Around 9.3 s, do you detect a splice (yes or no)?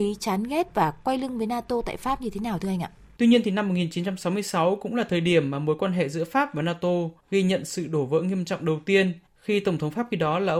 yes